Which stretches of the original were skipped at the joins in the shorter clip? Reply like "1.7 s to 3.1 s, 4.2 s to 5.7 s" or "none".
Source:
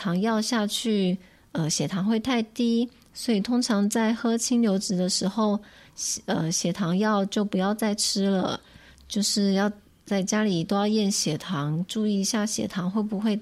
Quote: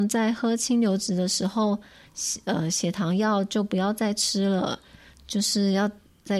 none